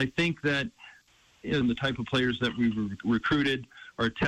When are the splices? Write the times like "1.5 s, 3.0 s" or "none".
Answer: 1.6 s